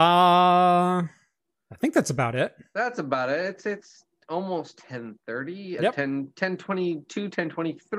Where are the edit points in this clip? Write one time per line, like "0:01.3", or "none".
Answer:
0:05.8